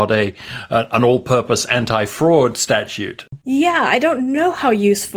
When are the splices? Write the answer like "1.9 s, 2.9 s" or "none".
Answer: 3.4 s